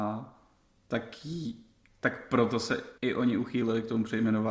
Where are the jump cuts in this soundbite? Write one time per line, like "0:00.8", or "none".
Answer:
0:03.0

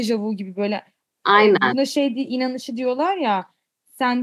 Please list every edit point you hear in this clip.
none

